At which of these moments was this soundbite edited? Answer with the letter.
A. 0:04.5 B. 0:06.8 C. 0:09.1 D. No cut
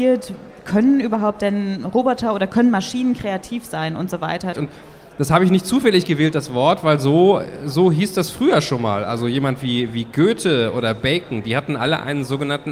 A